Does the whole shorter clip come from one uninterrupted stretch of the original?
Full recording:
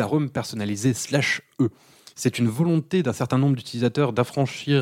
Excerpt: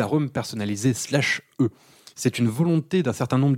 yes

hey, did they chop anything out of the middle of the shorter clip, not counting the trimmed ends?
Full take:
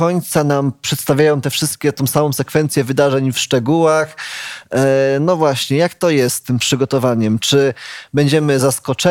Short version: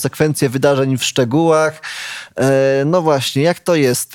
no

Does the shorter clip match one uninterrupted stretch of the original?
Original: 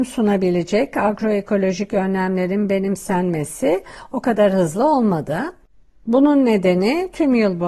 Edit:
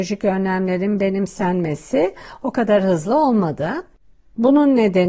yes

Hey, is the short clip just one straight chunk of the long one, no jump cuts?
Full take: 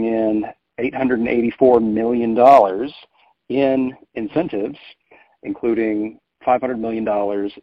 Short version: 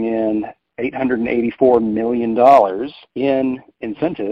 no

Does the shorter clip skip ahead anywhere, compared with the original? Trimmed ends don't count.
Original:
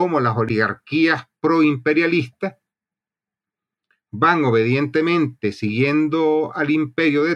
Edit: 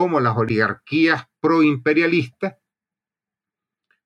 no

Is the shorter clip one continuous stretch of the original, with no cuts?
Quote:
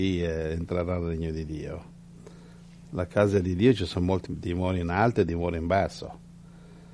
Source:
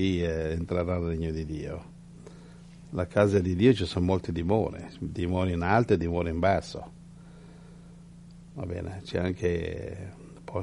no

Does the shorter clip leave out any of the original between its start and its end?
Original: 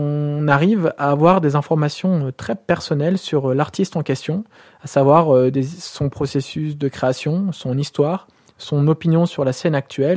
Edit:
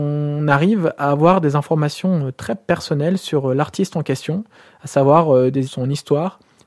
yes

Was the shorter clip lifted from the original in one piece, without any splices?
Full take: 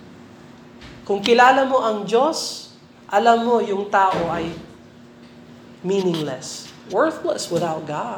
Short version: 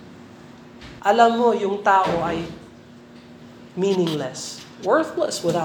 no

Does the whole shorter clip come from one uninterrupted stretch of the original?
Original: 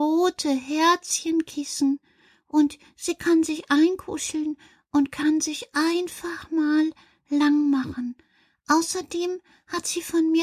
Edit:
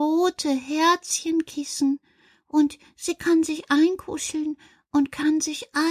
yes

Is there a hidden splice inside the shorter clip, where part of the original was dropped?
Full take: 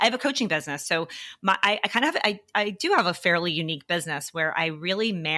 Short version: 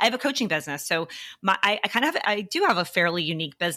yes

